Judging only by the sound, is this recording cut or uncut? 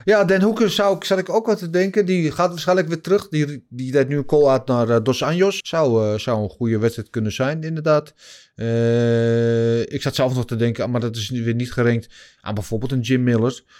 cut